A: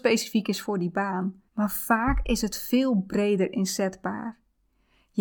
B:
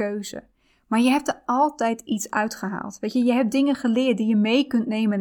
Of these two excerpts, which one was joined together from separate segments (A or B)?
A